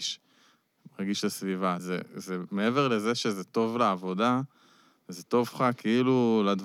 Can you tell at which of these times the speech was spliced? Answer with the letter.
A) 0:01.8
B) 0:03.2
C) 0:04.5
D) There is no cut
A